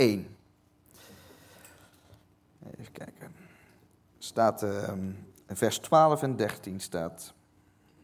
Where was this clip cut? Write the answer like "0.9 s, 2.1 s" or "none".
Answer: none